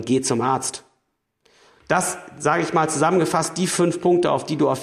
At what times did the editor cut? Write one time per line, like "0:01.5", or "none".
0:01.8